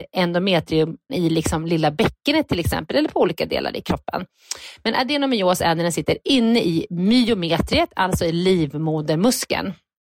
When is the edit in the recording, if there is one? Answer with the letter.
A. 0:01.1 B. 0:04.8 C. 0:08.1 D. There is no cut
A